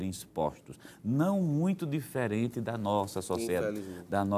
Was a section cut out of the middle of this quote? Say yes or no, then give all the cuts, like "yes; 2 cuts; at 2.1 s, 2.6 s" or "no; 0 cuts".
no; 0 cuts